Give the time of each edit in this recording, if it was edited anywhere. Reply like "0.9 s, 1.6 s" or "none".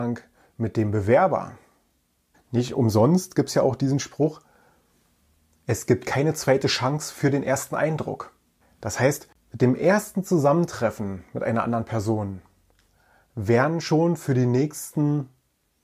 2.3 s

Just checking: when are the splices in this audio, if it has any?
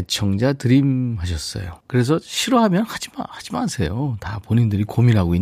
1.8 s

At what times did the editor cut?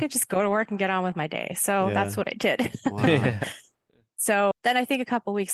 4.5 s

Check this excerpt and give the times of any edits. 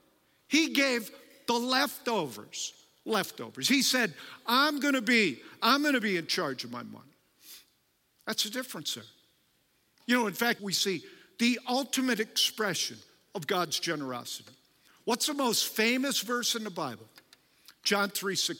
10.6 s

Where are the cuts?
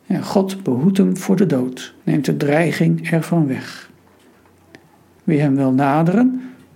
2.0 s, 5.2 s

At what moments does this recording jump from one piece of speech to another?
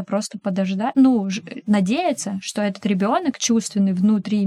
none

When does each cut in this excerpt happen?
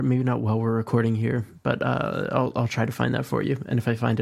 none

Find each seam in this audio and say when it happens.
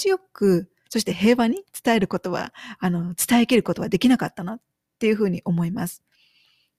none

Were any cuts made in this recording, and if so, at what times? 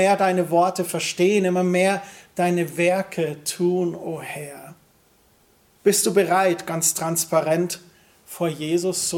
none

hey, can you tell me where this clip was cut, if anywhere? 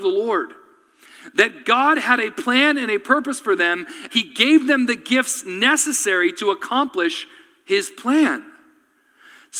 4.1 s

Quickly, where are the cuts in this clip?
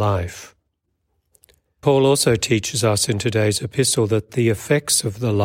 1.8 s

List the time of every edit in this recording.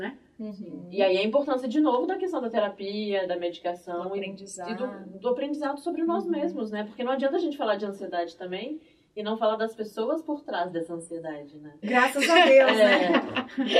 11.8 s

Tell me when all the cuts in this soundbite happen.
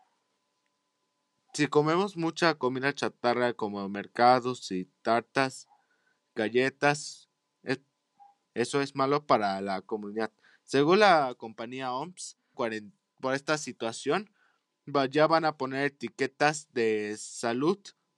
8.4 s, 12.5 s

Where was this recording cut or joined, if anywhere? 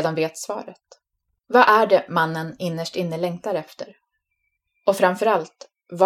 1.4 s

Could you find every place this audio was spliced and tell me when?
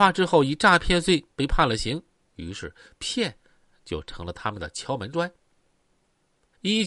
2.3 s

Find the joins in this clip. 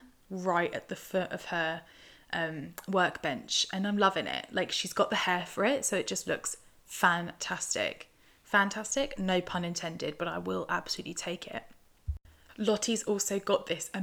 12.5 s

